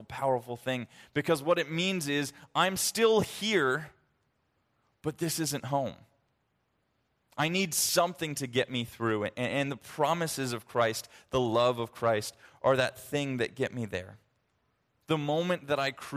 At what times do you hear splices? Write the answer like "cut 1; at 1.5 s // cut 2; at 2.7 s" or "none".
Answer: cut 1; at 14.9 s